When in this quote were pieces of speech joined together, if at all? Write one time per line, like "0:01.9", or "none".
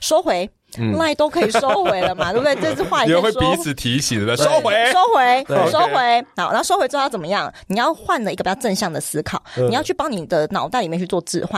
none